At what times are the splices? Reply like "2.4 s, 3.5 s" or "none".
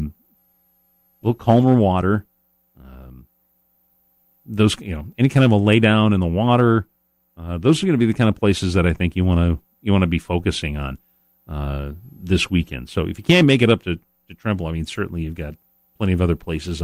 none

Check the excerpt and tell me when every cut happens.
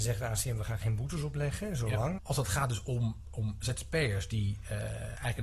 2.2 s, 3.2 s

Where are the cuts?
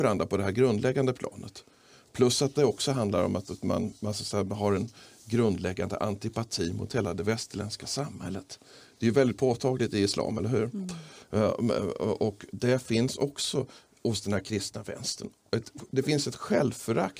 none

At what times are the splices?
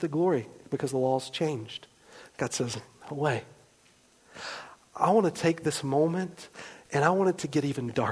none

